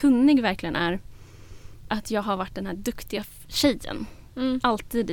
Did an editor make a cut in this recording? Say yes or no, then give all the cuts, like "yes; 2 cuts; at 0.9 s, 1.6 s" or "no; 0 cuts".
yes; 1 cut; at 1.9 s